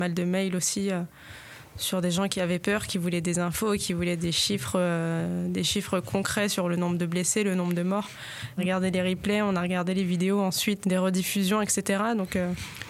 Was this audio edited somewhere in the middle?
yes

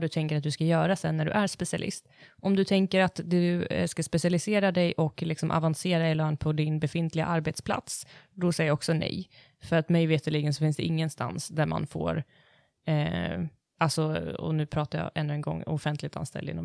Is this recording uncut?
yes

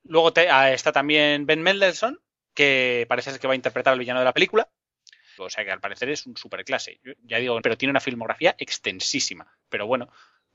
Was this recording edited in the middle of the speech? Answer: yes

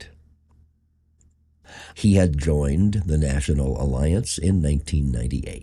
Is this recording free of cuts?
no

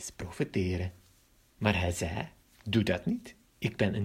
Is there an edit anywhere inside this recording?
yes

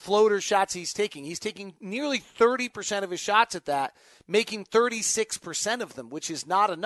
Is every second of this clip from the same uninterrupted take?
yes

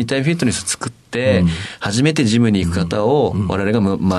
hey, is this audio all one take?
yes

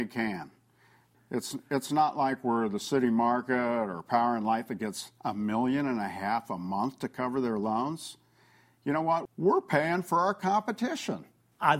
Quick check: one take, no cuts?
no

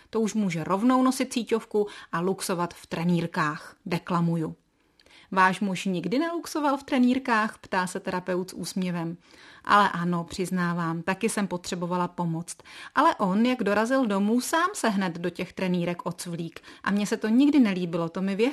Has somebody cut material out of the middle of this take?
no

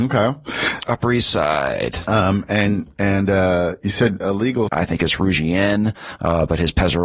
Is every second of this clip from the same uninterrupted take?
no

